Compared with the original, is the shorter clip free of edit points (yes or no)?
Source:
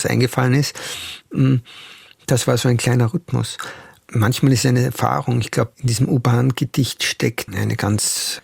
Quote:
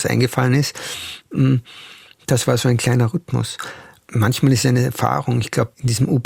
yes